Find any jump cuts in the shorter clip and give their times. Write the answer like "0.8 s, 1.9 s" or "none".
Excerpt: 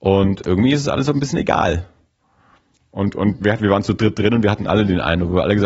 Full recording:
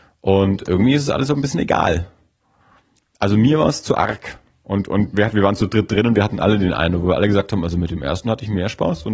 2.8 s